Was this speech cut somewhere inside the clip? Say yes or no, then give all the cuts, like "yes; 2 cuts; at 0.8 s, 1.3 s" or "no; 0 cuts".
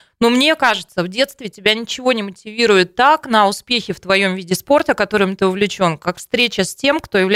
no; 0 cuts